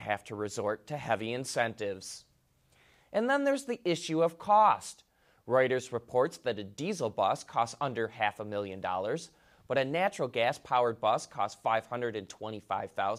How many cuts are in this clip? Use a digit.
1